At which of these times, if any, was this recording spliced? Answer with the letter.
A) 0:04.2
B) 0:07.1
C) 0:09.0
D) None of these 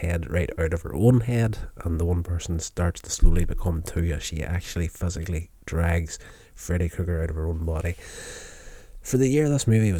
D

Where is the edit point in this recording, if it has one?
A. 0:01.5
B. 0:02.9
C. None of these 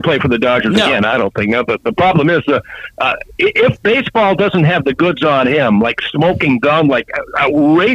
C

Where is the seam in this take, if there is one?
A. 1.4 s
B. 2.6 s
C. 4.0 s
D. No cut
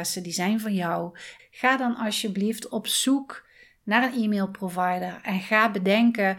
A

